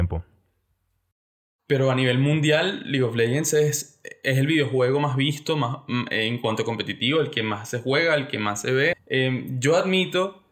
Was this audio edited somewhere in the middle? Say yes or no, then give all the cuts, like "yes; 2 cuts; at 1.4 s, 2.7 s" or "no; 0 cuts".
yes; 1 cut; at 8.9 s